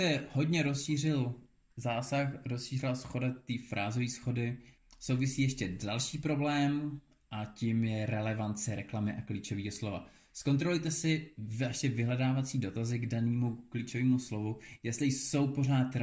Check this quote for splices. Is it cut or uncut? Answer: uncut